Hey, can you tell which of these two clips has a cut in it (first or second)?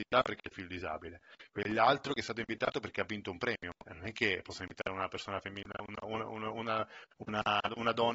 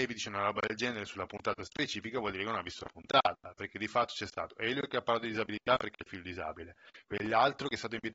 first